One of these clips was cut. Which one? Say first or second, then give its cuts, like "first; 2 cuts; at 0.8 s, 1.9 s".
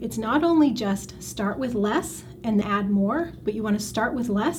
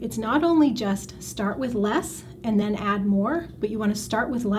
first; 1 cut; at 2.6 s